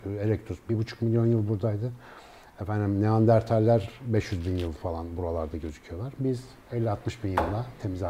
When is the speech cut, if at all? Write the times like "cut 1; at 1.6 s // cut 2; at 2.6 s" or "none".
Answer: cut 1; at 2.4 s